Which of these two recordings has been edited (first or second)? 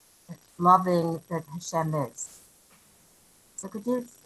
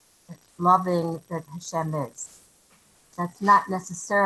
second